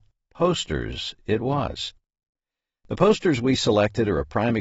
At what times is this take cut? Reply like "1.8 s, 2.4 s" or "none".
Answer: none